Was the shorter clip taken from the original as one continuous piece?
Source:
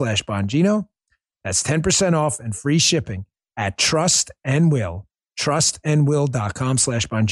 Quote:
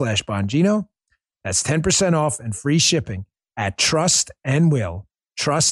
yes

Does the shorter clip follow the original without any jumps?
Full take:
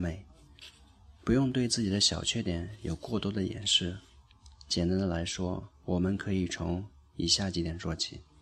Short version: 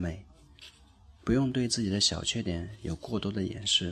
yes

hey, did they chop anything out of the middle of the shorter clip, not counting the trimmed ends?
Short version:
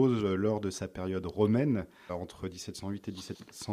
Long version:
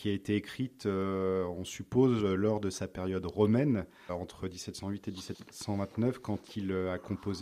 no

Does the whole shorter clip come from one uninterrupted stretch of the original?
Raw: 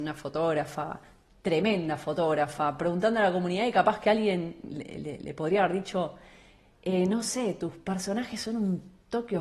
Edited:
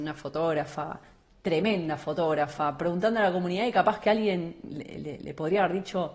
yes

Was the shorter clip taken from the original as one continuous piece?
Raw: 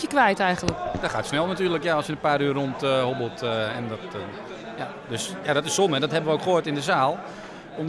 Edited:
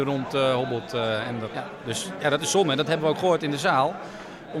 no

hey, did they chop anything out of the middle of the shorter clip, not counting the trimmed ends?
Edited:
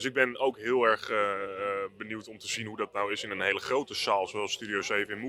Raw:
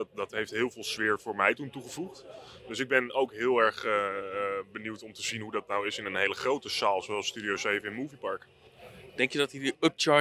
no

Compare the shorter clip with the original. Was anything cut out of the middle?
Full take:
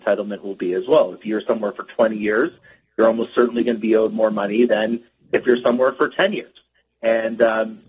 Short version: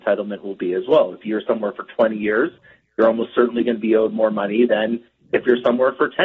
no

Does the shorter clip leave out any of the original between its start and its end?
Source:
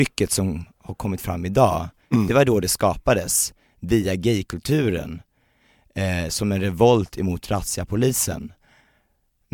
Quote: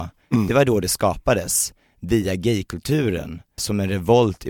yes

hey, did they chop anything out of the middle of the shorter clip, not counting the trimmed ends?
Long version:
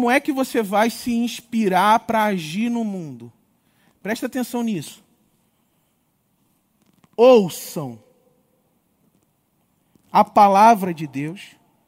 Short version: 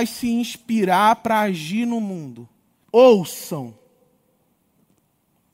yes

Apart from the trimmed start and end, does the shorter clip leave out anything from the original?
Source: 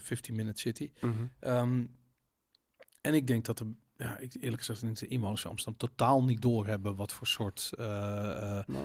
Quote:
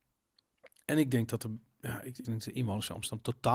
yes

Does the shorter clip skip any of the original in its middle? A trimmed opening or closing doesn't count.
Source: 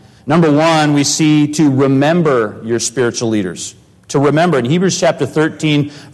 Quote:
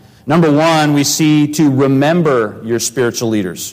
no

